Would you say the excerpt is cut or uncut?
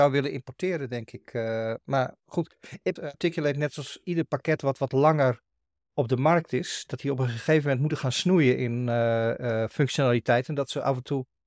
cut